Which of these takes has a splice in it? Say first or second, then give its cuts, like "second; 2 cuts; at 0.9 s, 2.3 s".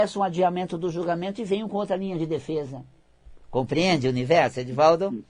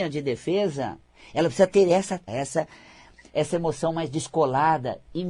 second; 1 cut; at 2.3 s